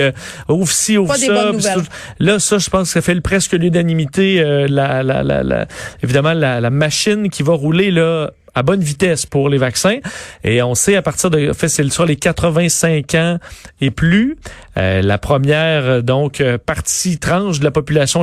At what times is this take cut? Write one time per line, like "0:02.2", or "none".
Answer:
none